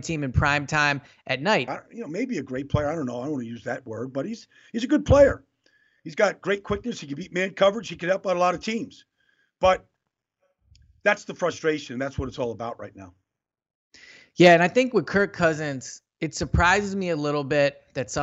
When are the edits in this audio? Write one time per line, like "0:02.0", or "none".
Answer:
0:01.7